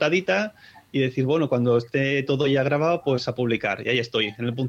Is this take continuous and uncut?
yes; 0 cuts

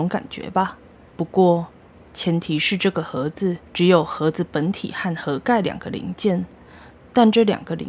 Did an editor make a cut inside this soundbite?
yes; 2 cuts; at 1.1 s, 3.7 s

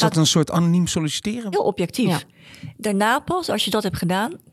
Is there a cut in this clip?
yes; 1 cut; at 1.5 s

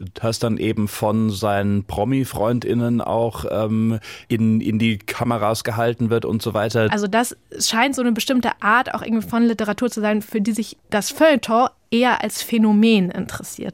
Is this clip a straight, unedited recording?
no; 2 cuts; at 6.9 s, 10.8 s

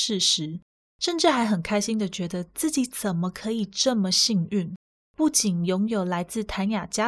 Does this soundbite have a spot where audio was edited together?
no; 0 cuts

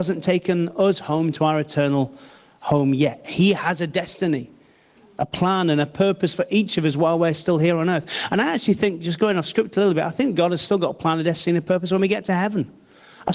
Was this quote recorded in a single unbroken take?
no; 1 cut; at 3.2 s

